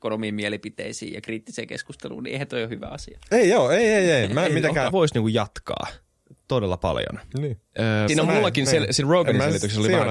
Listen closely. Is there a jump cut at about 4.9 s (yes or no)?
yes